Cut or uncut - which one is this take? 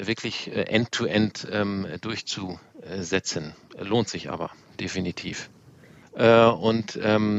cut